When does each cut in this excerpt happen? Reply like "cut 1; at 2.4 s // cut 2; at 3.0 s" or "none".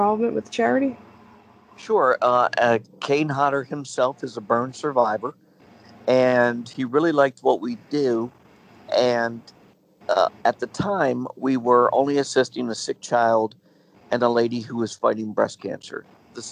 none